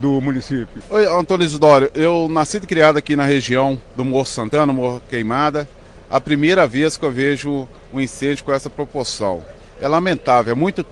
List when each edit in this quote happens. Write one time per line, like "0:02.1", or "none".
0:03.9
0:06.0